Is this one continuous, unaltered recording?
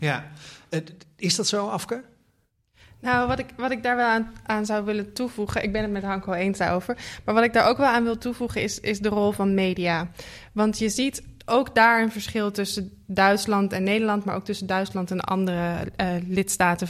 yes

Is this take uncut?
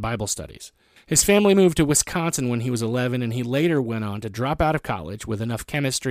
no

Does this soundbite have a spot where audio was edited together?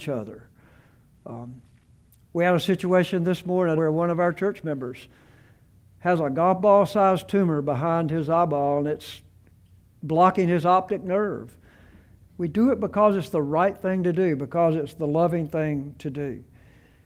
yes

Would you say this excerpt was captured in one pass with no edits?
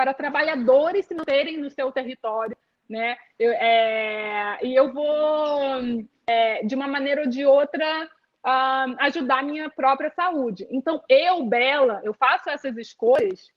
yes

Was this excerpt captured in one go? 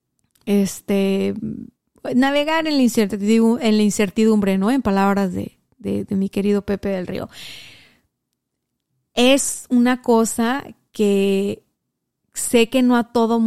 yes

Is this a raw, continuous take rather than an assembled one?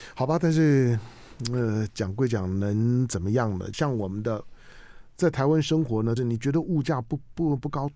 no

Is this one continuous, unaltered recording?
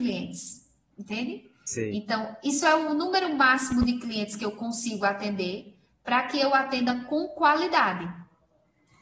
no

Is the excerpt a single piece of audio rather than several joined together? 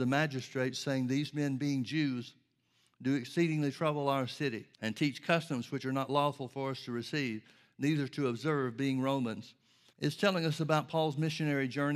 no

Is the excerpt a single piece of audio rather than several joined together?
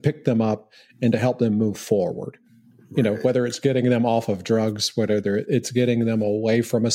yes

